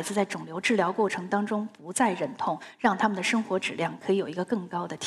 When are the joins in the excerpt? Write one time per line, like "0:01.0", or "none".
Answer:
none